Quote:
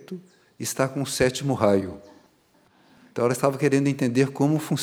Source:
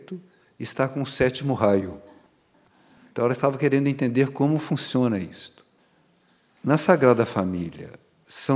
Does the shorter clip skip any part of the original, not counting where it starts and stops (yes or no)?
no